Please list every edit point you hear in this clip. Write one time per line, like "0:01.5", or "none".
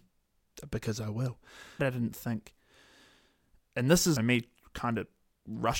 0:01.8
0:04.2